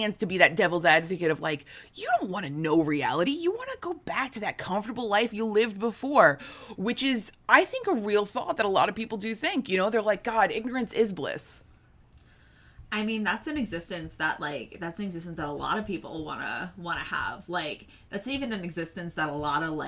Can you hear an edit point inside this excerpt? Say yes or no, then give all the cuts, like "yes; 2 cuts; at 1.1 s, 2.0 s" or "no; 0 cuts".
no; 0 cuts